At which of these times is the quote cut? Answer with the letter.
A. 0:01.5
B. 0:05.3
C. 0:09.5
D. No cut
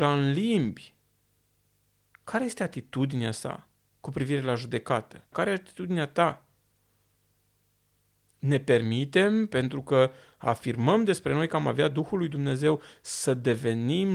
B